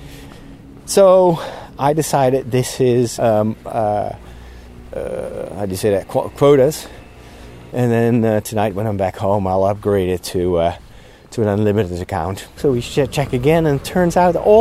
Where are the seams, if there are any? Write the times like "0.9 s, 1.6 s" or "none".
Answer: 3.2 s, 7.7 s, 12.6 s